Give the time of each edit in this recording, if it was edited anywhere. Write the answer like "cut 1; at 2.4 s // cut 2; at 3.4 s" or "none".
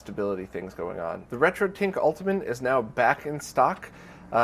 cut 1; at 1.3 s